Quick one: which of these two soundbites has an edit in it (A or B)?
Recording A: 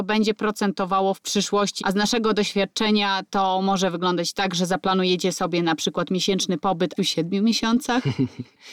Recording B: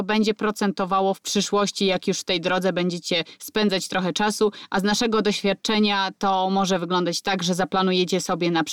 A